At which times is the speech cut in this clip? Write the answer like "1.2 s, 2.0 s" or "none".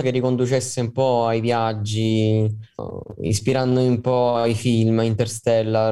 2.8 s